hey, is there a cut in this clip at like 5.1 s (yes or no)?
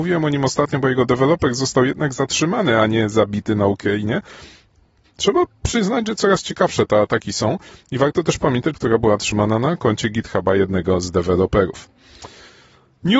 yes